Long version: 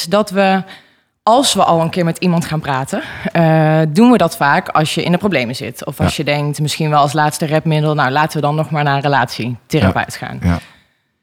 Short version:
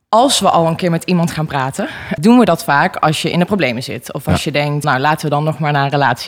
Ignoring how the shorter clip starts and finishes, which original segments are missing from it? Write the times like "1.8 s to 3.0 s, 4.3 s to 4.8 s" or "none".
3.3 s to 3.9 s, 6.6 s to 8.0 s